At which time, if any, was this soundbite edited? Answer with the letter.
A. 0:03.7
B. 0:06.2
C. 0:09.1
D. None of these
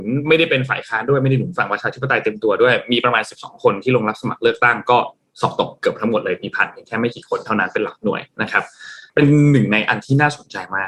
C